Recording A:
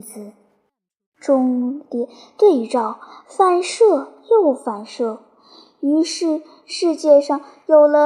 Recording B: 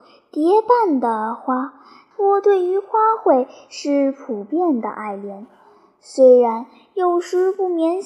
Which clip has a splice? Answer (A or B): B